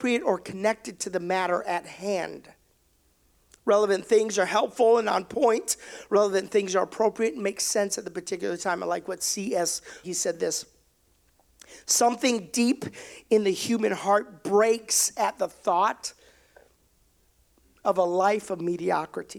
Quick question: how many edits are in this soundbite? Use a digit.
1